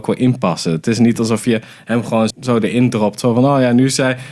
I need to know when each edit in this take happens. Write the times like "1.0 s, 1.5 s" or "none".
2.3 s